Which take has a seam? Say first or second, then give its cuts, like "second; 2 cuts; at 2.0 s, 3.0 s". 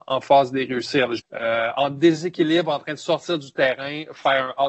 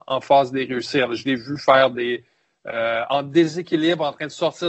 first; 1 cut; at 1.2 s